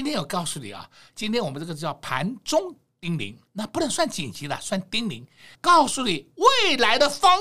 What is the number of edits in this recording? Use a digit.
1